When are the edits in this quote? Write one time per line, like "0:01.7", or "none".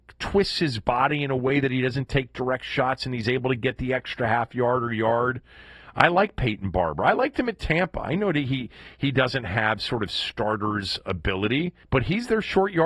0:11.8